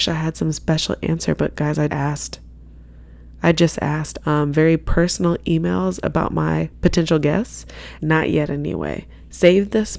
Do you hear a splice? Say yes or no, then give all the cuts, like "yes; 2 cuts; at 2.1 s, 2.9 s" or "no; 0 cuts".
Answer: yes; 3 cuts; at 1.9 s, 4.2 s, 8.0 s